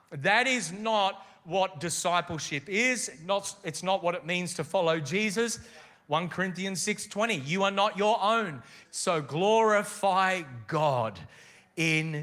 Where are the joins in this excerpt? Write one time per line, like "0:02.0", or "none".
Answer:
0:05.9
0:08.8

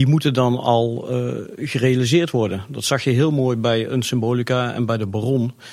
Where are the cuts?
none

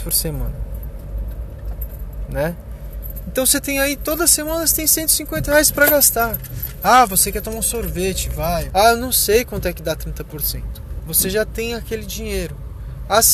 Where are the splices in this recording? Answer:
0:08.7
0:11.0

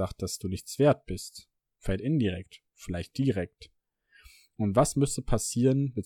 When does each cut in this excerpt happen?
none

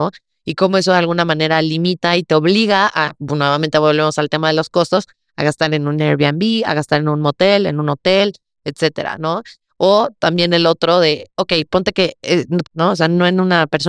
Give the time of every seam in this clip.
0:11.3
0:12.6

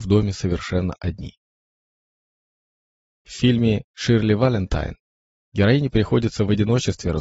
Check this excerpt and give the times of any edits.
none

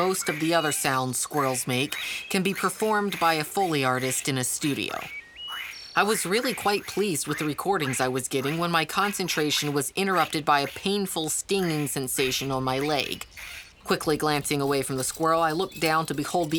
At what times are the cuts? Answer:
0:13.7

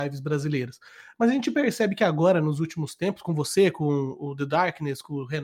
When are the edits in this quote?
none

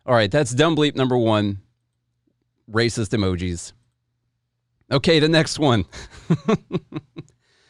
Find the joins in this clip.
none

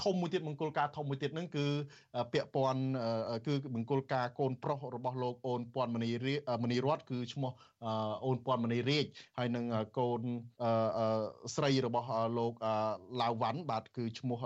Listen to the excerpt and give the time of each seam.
0:10.5

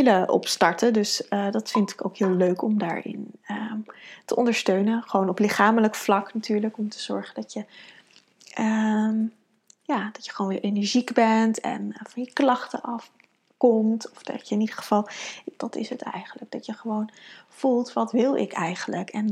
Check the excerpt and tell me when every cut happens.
0:15.6

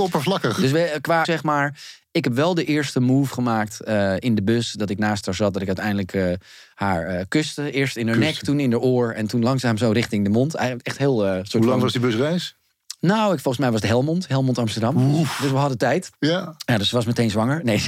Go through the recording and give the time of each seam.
0:01.2

